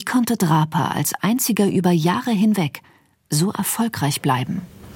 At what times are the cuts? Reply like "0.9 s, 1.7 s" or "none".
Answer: none